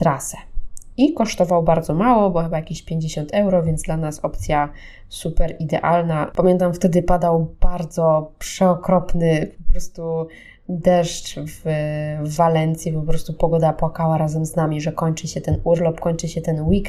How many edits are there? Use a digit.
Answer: 1